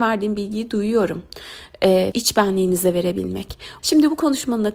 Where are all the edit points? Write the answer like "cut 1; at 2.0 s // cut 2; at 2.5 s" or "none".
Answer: cut 1; at 2.1 s // cut 2; at 3.8 s